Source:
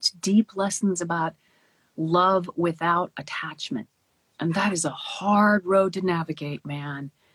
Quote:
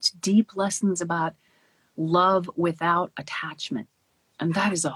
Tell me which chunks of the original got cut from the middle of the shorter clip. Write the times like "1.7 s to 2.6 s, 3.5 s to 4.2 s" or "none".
none